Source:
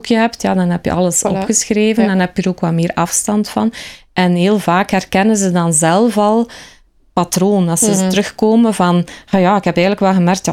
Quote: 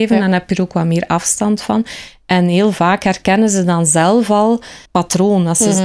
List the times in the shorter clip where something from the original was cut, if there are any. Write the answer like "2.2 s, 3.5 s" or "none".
4.8 s

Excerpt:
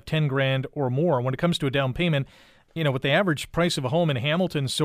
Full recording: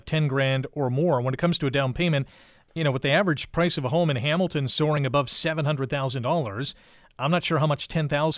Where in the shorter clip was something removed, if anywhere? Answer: none

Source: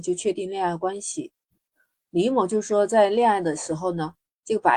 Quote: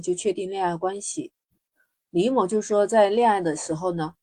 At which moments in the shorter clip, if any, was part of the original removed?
none

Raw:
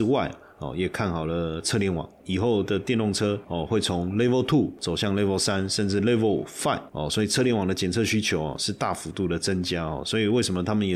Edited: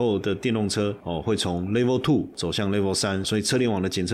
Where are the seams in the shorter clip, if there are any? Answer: 3.2 s

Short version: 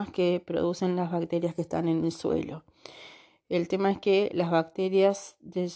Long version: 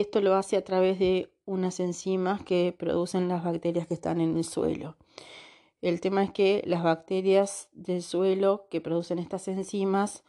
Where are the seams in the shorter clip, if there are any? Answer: none

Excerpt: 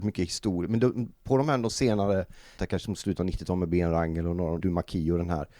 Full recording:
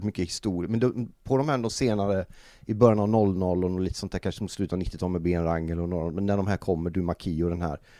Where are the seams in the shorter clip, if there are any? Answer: 2.6 s, 4.6 s

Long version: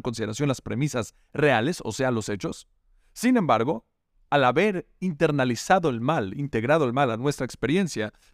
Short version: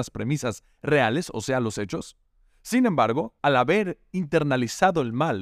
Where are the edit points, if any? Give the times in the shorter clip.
3.4 s

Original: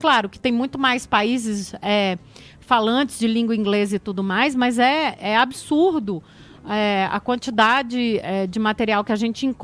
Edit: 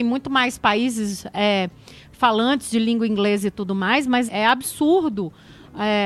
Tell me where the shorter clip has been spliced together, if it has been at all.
4.3 s

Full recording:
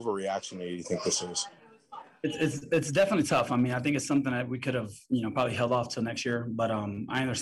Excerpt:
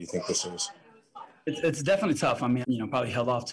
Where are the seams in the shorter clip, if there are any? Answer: 1.6 s, 2.6 s

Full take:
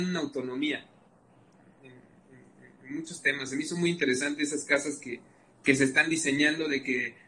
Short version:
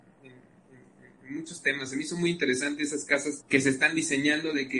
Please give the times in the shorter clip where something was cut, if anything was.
3.4 s

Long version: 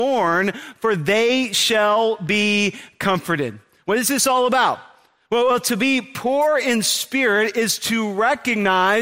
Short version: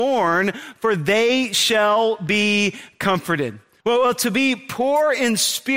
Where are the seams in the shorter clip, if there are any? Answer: 3.8 s

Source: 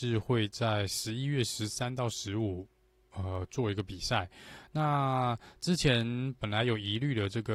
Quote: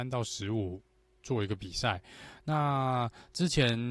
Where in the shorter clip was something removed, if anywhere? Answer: 1.2 s

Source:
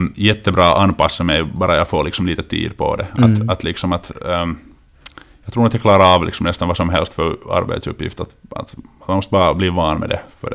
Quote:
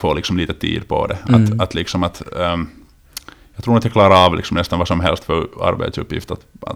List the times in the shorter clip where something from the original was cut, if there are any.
none

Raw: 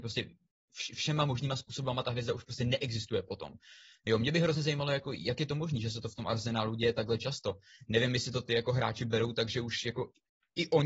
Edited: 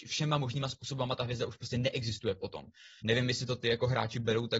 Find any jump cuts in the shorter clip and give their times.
3.0 s

